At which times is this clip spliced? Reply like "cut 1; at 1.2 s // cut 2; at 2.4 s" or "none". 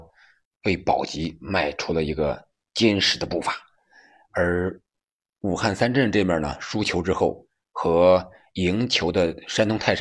none

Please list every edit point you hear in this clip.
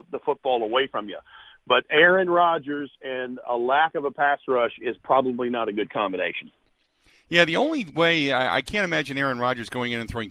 none

